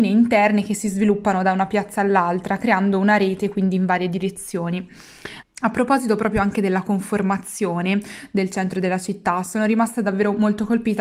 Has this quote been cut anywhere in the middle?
yes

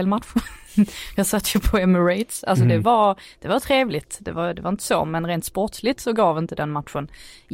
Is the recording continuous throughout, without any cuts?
yes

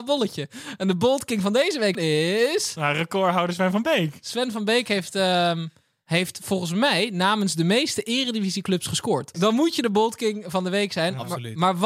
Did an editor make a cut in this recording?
yes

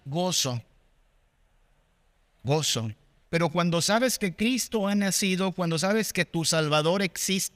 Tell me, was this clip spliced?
yes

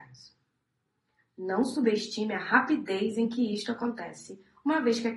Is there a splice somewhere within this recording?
yes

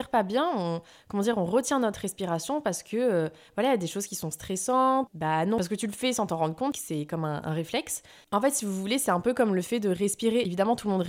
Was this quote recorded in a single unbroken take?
no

